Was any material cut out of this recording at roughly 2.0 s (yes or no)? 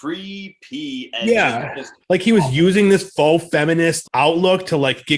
yes